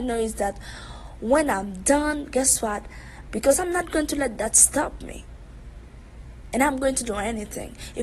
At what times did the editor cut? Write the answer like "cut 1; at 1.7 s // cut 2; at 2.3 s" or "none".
cut 1; at 3.3 s // cut 2; at 6.5 s